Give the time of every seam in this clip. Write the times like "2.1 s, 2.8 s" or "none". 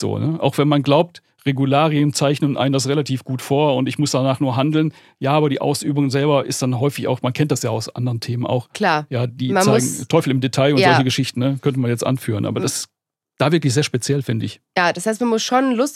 none